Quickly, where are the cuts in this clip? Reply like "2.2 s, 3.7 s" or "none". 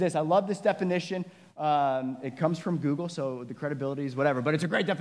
none